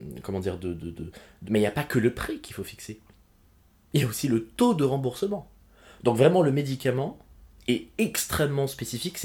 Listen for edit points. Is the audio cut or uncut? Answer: cut